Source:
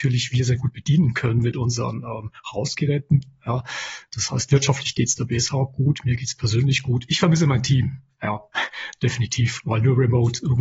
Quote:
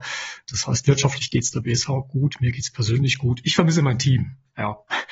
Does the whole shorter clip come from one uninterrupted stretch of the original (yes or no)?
yes